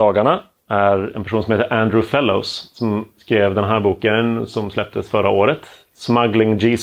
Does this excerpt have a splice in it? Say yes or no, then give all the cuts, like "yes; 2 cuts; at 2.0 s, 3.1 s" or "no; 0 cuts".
no; 0 cuts